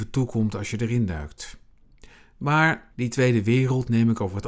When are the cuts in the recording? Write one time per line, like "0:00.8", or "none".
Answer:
0:02.9